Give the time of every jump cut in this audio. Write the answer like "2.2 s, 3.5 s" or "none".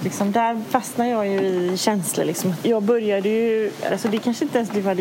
2.6 s, 3.9 s